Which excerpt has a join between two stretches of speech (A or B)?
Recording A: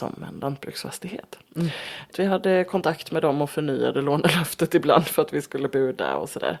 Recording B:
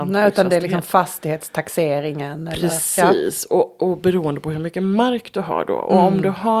A